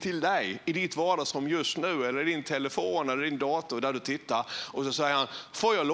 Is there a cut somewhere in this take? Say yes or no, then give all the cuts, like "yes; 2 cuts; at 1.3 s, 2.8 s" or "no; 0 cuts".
no; 0 cuts